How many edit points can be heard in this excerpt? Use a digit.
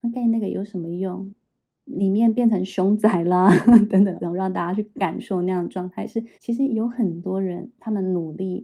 3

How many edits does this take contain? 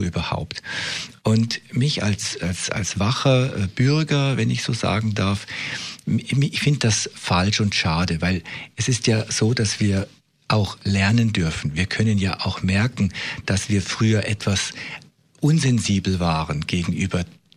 0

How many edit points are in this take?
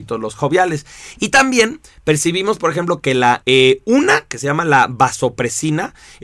2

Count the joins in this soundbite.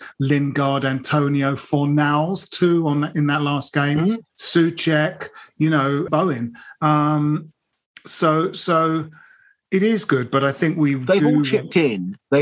1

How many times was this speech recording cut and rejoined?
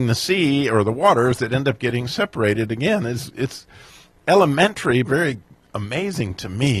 1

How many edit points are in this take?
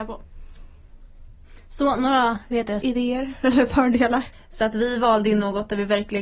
2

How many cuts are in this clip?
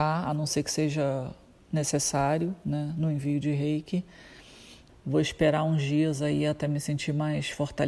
1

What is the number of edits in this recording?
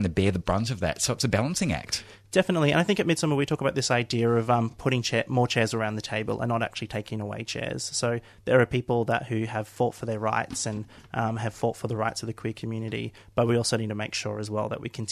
0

